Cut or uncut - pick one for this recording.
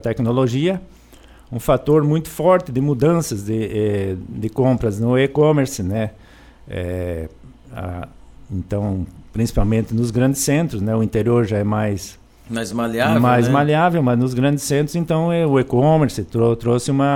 uncut